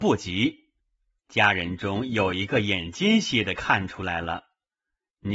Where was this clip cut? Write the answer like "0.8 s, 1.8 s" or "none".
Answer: 1.2 s